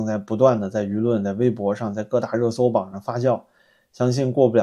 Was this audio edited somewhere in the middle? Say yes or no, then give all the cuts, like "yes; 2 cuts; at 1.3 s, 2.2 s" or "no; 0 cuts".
no; 0 cuts